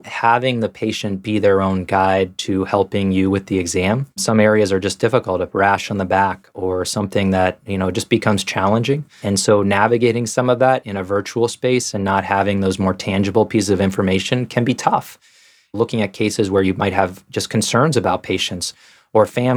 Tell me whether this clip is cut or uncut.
cut